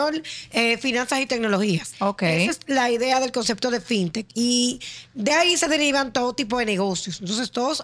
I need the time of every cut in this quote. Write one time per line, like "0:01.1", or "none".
0:01.9